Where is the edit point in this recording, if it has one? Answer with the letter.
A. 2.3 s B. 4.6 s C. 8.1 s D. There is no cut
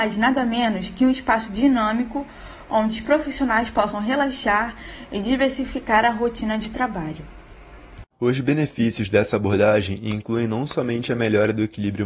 C